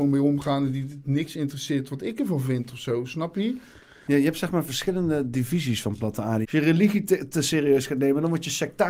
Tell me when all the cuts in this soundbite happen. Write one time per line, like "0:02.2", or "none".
0:04.1
0:06.4